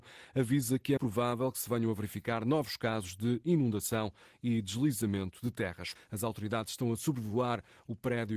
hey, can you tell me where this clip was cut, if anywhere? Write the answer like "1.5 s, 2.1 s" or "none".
1.0 s, 6.0 s